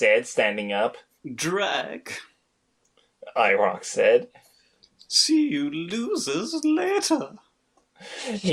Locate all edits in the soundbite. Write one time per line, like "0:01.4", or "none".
none